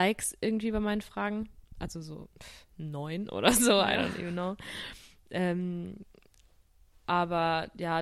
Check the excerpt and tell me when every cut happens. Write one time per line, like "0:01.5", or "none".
none